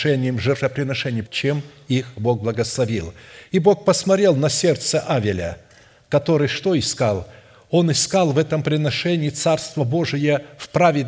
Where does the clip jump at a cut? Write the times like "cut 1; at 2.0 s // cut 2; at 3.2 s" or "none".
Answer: cut 1; at 1.3 s